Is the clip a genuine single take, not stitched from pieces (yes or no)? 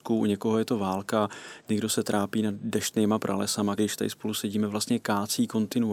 no